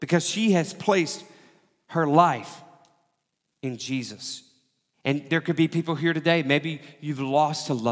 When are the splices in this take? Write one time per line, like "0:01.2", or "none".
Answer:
0:04.9